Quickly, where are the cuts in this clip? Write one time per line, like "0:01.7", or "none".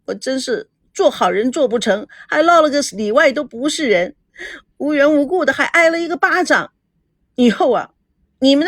none